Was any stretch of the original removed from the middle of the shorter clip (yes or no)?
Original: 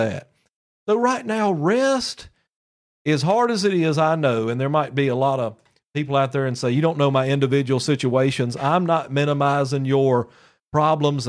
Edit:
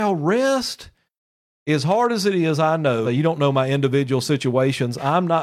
yes